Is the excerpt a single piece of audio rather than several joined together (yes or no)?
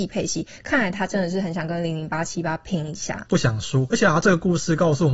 yes